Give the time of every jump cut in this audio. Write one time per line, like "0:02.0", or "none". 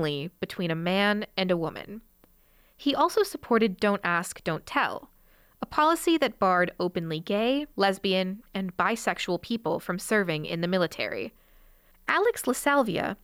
0:07.7
0:11.9